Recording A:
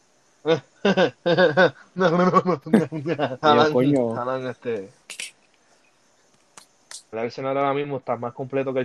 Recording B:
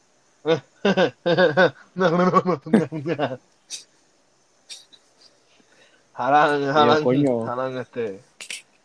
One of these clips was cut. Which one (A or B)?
A